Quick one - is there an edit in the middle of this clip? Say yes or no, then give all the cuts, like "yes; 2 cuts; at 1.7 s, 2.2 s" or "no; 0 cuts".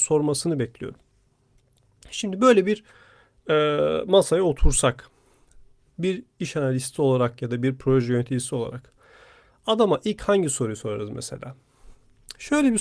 no; 0 cuts